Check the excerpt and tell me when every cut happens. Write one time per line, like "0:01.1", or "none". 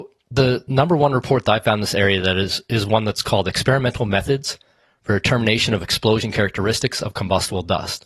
none